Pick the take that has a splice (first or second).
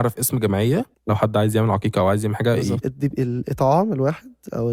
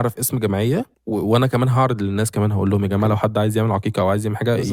first